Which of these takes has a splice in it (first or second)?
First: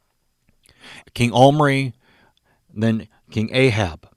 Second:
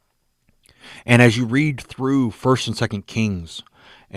first